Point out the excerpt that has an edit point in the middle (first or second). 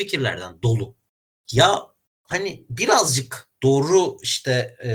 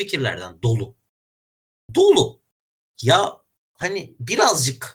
first